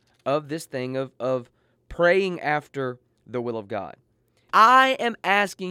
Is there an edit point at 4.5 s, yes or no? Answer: yes